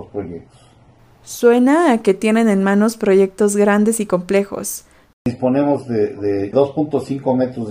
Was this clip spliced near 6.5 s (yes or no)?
yes